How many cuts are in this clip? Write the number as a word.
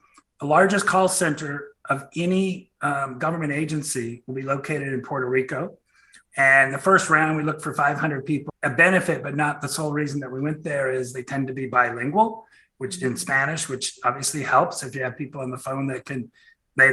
two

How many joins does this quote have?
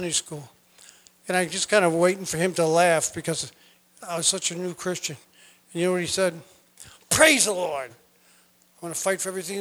one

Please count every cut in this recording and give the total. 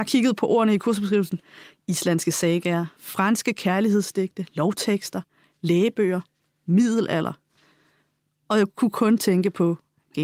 zero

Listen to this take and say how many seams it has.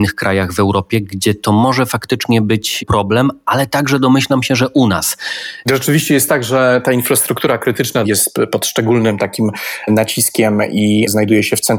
two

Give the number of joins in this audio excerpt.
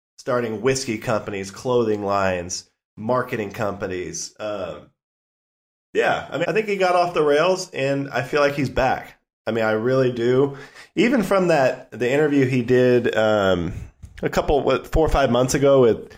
one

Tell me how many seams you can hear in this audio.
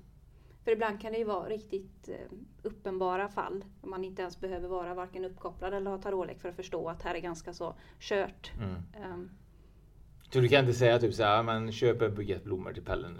one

